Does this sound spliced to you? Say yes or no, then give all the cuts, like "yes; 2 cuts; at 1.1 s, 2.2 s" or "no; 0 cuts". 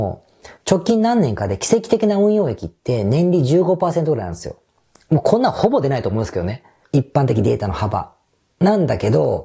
yes; 1 cut; at 6.8 s